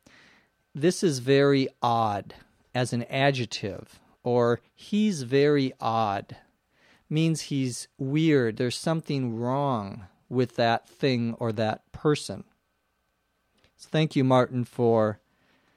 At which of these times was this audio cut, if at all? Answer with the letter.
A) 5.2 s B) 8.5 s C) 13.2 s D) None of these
B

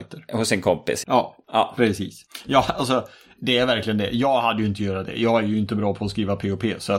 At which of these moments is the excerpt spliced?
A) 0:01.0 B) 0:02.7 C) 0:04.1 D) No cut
A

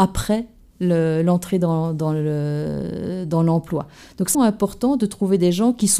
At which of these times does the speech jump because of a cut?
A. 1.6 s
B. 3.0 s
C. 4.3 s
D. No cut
C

